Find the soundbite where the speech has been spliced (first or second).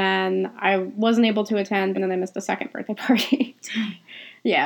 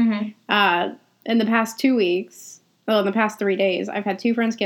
first